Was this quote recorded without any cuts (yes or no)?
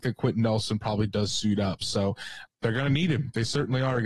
no